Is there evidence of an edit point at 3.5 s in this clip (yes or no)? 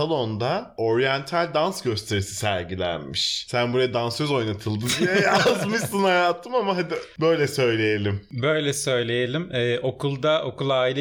no